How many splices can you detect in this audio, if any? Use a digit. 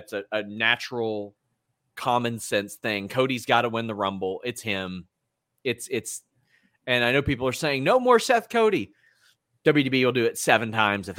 0